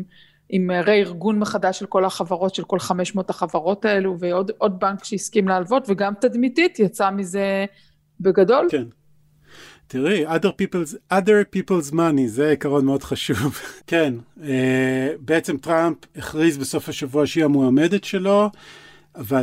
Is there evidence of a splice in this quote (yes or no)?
yes